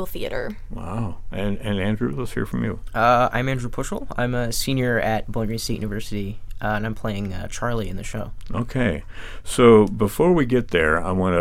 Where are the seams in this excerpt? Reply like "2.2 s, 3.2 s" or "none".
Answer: none